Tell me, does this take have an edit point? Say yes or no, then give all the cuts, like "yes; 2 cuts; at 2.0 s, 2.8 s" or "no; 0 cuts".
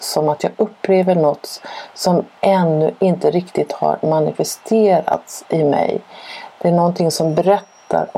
no; 0 cuts